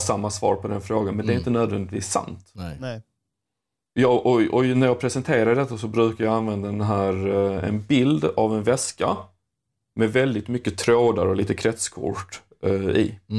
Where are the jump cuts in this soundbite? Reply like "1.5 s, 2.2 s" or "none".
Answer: none

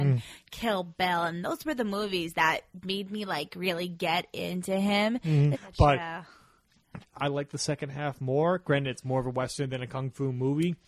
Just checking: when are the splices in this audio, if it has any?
5.5 s, 7.0 s

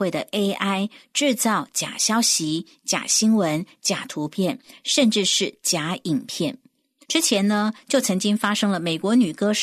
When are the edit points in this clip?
7.0 s

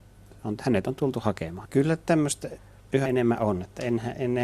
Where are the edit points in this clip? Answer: 1.6 s, 3.1 s

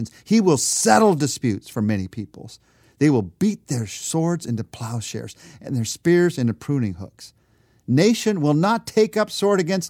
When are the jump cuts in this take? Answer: none

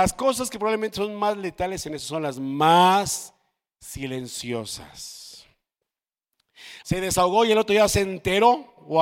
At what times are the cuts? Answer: 6.8 s

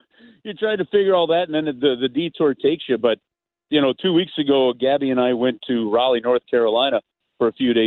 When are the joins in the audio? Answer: none

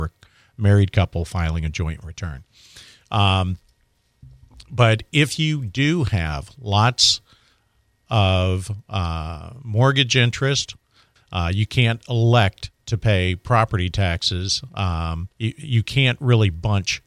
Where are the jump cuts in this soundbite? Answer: 11.2 s, 15.3 s

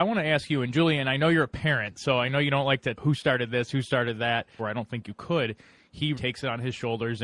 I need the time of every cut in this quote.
3.0 s, 4.6 s, 6.1 s

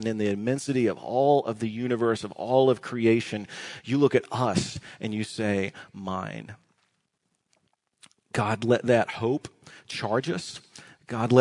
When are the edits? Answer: none

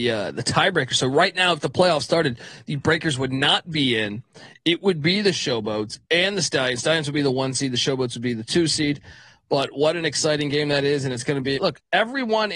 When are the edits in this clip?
11.6 s

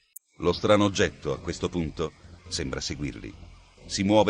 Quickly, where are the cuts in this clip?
2.4 s

